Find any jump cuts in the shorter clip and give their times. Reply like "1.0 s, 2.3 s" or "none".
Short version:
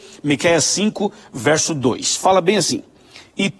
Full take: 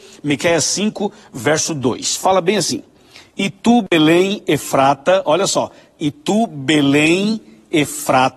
none